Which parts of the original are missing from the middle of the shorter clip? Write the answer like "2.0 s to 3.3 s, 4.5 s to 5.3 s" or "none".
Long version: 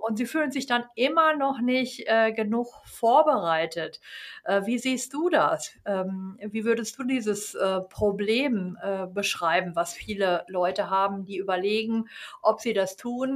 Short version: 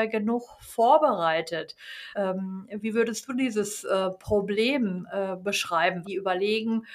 4.4 s to 5.8 s, 9.7 s to 11.3 s